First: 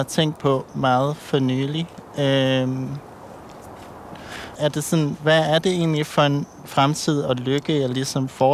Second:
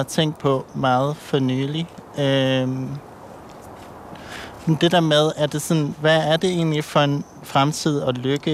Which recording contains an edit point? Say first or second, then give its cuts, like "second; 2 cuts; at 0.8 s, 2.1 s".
first; 1 cut; at 4.6 s